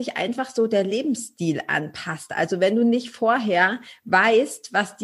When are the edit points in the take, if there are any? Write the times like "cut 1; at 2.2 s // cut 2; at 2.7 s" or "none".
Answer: none